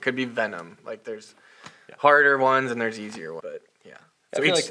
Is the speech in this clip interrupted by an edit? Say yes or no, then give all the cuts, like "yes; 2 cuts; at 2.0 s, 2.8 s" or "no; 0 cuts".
yes; 1 cut; at 3.4 s